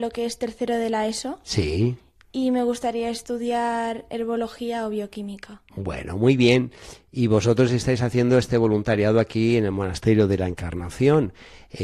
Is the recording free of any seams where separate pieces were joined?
yes; 0 cuts

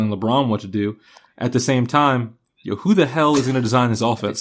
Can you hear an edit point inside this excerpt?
no; 0 cuts

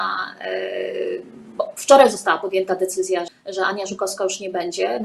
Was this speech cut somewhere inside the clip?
yes; 1 cut; at 3.3 s

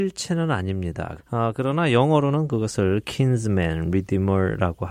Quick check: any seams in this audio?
yes; 1 cut; at 1.2 s

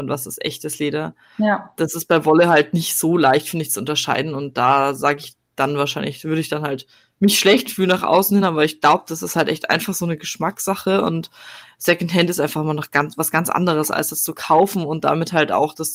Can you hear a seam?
no; 0 cuts

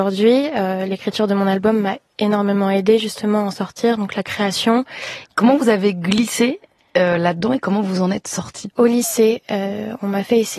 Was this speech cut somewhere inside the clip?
yes; 2 cuts; at 5.2 s, 8.7 s

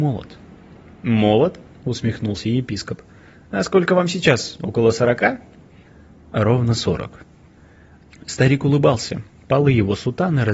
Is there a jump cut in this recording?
no; 0 cuts

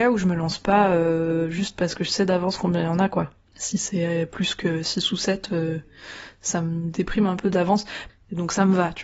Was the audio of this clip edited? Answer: yes; 2 cuts; at 3.5 s, 8.1 s

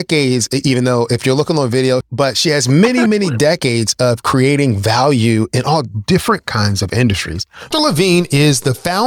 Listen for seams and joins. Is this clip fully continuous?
no; 2 cuts; at 2.0 s, 7.7 s

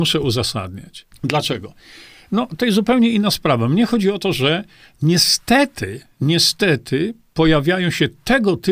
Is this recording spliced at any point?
yes; 1 cut; at 1.1 s

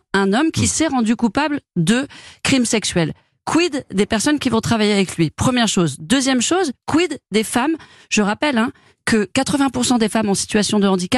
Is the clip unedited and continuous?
yes; 0 cuts

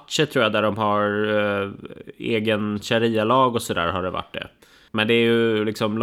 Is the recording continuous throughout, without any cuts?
no; 1 cut; at 4.9 s

